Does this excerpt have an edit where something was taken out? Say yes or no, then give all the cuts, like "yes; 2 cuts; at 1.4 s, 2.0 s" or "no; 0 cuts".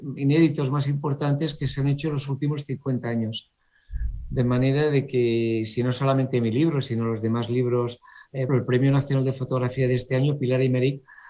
yes; 1 cut; at 8.5 s